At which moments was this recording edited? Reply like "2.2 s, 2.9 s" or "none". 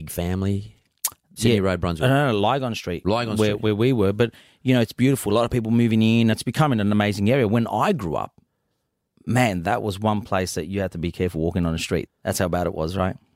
1.4 s, 6.3 s, 12.1 s

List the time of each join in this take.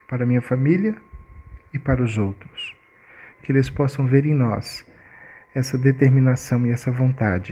3.3 s

